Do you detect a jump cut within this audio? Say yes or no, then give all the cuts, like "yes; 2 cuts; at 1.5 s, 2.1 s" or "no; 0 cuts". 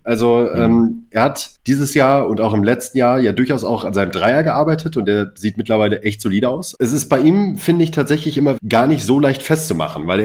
yes; 2 cuts; at 6.7 s, 8.6 s